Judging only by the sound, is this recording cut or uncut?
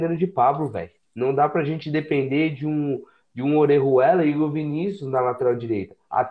cut